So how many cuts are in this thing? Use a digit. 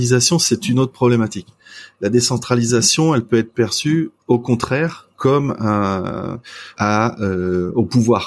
2